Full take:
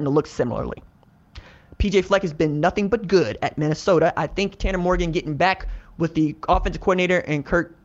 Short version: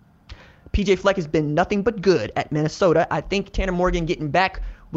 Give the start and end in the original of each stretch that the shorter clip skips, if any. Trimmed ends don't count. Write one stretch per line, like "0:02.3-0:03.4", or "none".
none